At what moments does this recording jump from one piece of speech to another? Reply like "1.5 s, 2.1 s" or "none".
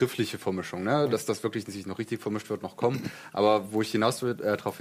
none